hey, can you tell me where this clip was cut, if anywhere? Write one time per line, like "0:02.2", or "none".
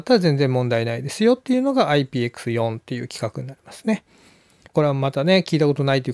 0:04.7